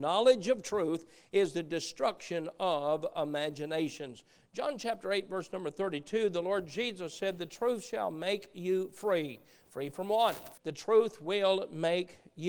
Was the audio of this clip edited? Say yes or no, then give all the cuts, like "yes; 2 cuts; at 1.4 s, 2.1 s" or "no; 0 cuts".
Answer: yes; 1 cut; at 10.6 s